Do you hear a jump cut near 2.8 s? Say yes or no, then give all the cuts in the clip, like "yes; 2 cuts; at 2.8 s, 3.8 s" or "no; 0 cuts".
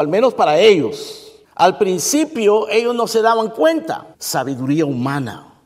no; 2 cuts; at 1.4 s, 4.1 s